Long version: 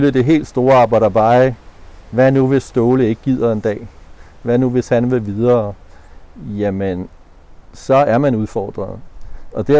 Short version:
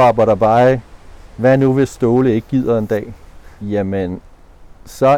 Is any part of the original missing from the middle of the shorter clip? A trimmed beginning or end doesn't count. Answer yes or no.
yes